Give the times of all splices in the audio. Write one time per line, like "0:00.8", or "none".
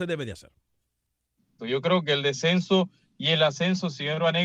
0:01.6